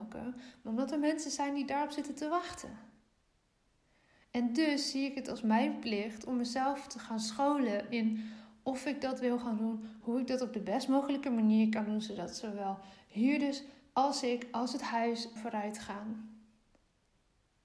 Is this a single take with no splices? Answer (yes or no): no